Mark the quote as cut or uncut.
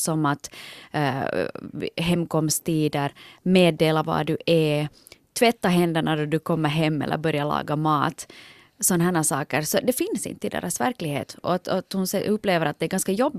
uncut